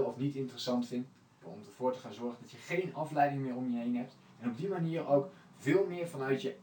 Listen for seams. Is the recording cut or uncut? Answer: cut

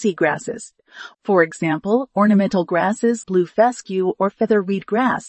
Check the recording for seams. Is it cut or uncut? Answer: cut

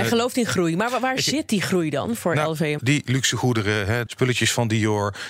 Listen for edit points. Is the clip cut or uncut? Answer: cut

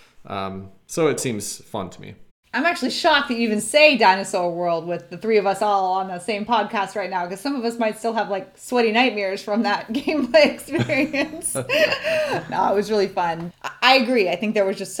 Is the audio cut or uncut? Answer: cut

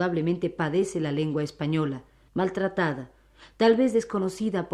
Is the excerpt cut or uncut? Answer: cut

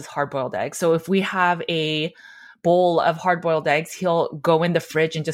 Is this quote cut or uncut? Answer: uncut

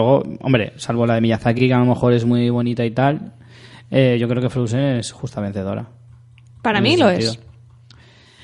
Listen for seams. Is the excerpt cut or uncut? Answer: uncut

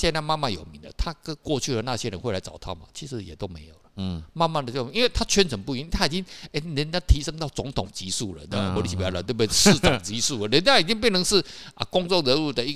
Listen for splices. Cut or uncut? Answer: uncut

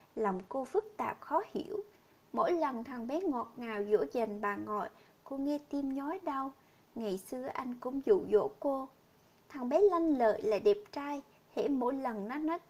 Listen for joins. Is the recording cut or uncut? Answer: uncut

